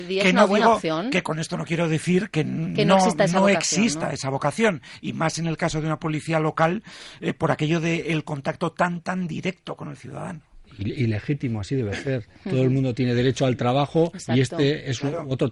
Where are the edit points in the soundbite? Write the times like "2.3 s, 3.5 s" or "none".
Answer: none